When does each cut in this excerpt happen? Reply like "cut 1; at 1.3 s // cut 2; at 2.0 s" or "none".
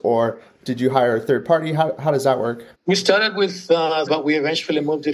cut 1; at 2.7 s // cut 2; at 4.1 s